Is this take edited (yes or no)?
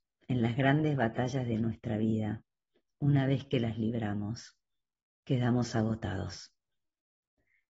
no